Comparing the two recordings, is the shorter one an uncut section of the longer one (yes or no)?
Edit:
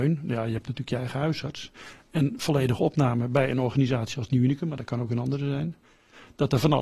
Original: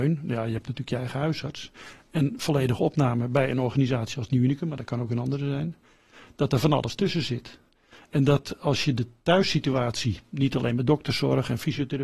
yes